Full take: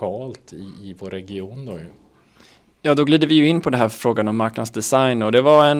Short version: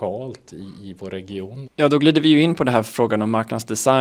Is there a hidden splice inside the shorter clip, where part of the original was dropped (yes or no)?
yes